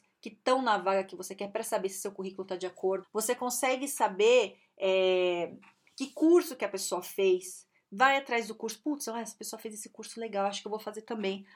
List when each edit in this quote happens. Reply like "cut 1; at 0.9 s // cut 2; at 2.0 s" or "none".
cut 1; at 3.0 s